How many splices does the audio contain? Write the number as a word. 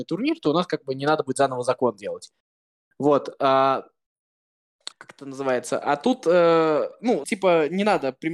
two